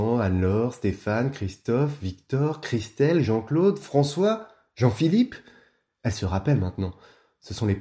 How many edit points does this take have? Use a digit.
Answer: 0